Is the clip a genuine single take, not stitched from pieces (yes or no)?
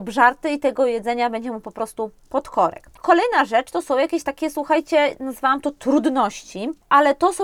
yes